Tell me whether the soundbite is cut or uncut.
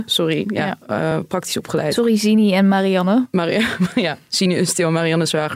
uncut